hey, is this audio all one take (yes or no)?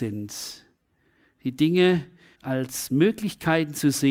no